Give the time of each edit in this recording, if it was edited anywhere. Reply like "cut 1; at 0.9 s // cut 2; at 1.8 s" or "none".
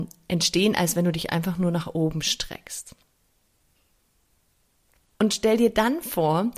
cut 1; at 5.1 s